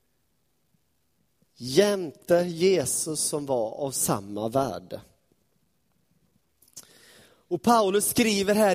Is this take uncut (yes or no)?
yes